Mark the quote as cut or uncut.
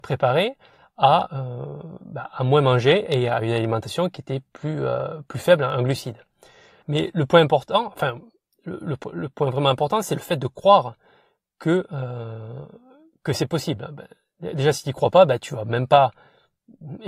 uncut